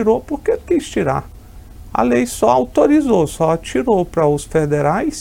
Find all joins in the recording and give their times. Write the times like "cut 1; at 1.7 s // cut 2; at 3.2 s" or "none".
none